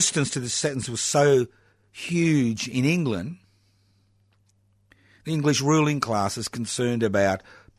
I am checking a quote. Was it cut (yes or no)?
no